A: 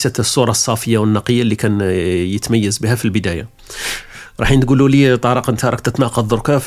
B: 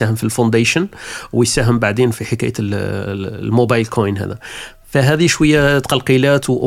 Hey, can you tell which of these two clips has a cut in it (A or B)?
B